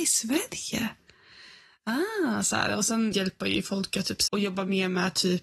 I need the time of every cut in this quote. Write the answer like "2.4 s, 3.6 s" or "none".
3.1 s, 4.3 s